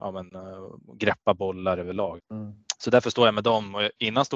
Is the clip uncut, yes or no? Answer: no